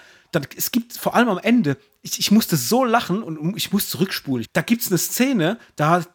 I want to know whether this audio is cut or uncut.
cut